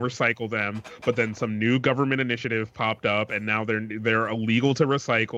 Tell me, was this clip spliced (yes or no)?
no